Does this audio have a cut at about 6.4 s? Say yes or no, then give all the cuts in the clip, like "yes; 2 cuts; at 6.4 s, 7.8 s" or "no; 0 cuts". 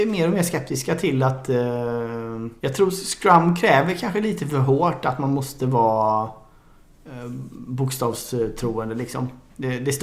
no; 1 cut; at 2.6 s